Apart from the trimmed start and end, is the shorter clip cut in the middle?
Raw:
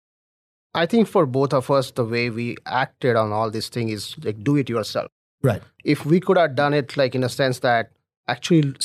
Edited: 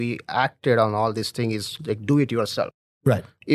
no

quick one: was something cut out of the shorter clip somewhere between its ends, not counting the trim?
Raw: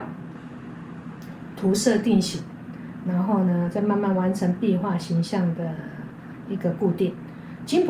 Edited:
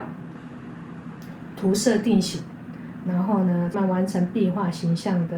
yes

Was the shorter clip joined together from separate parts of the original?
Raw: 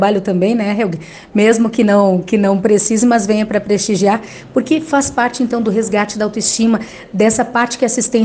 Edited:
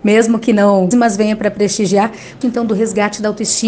yes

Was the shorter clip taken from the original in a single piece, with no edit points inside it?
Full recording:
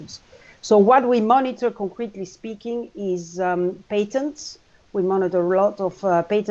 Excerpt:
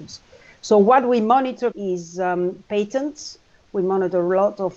no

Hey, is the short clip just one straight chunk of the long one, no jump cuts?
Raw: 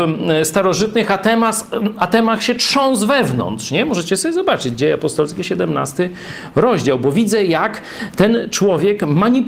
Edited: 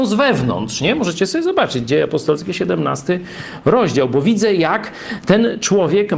yes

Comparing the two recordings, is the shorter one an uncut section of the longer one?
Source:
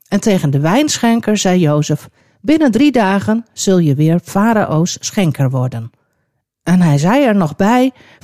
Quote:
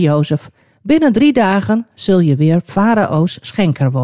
yes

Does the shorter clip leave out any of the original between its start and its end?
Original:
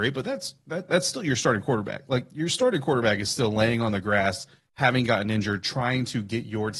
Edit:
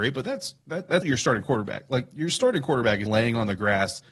yes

